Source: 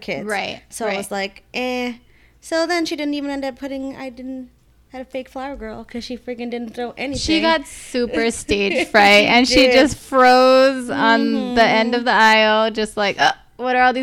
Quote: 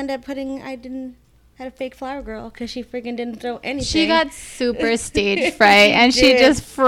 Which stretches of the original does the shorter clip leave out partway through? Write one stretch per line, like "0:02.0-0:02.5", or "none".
none